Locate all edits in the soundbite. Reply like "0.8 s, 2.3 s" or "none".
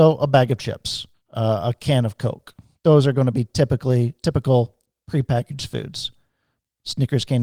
none

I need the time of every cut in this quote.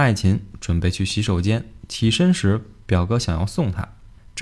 none

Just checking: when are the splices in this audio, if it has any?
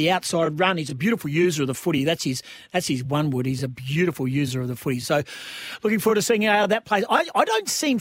none

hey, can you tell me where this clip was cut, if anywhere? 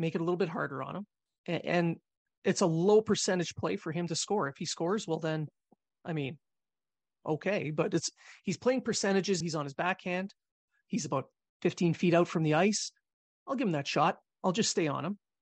9.4 s

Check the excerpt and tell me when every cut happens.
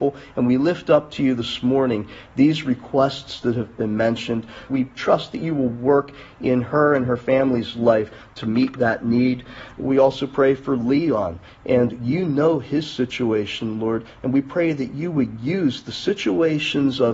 4.7 s

